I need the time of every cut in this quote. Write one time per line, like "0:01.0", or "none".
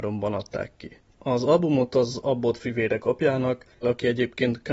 0:03.8